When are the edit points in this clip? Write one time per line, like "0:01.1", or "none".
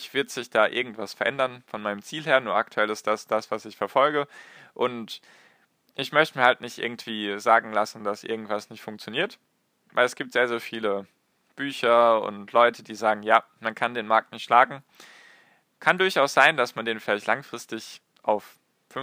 none